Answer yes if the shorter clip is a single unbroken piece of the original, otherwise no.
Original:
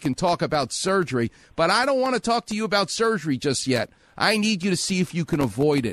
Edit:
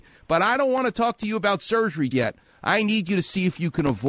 no